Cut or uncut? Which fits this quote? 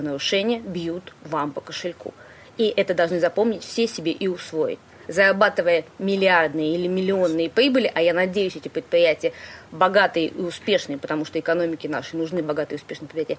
uncut